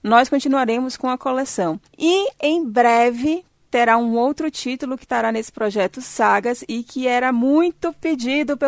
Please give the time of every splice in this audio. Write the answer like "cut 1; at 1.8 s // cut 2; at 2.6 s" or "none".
cut 1; at 1.9 s

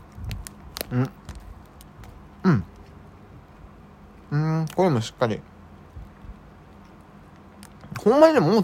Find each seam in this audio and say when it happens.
none

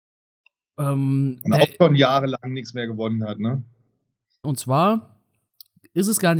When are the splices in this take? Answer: cut 1; at 4.4 s

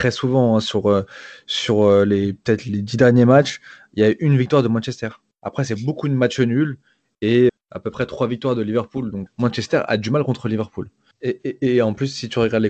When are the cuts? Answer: cut 1; at 7.5 s // cut 2; at 9.3 s // cut 3; at 11.1 s

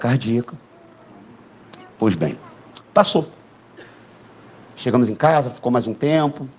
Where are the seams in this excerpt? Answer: none

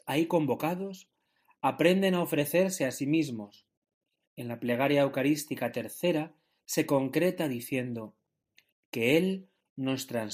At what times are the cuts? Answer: none

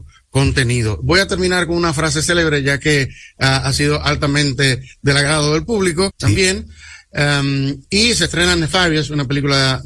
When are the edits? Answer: cut 1; at 6.1 s

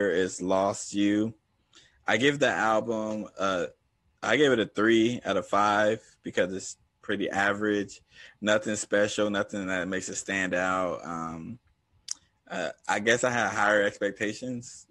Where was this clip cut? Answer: none

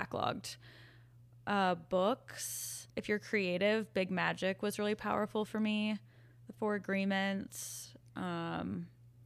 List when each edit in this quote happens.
cut 1; at 2.9 s

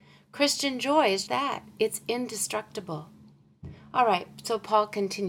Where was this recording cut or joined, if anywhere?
cut 1; at 1.2 s

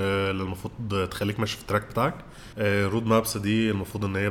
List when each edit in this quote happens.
cut 1; at 2.5 s

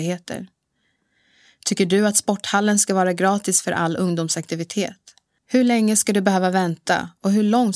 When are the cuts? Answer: cut 1; at 5.4 s

